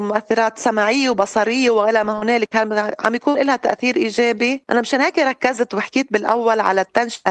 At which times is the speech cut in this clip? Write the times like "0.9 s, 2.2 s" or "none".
none